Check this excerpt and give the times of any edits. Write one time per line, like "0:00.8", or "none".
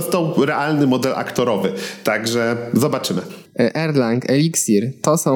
0:03.5